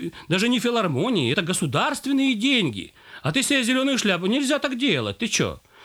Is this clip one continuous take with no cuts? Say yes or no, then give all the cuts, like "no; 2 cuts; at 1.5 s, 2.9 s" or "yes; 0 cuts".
yes; 0 cuts